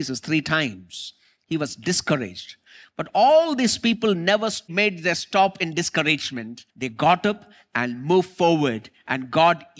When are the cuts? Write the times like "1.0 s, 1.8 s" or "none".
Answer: 6.7 s